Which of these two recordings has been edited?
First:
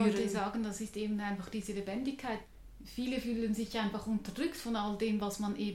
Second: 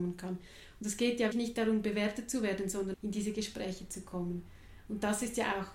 second; 2 cuts; at 1.3 s, 2.9 s

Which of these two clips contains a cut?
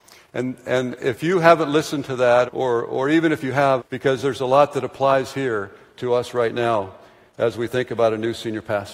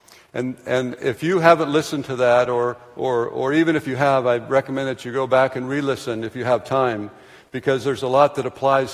first; 2 cuts; at 2.5 s, 3.8 s

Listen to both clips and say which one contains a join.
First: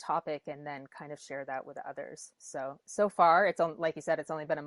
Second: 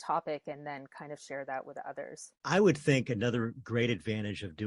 second; 1 cut; at 2.3 s

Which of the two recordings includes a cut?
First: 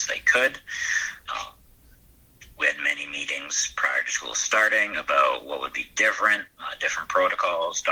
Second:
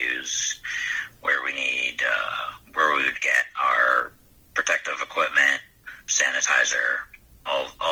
first; 2 cuts; at 1.3 s, 6.5 s

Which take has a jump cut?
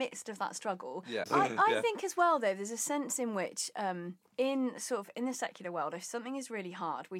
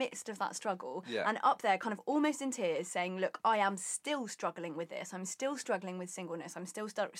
first; 2 cuts; at 1.2 s, 4.3 s

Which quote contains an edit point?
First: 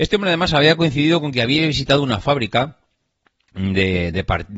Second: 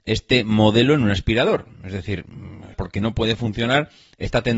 second; 1 cut; at 2.7 s

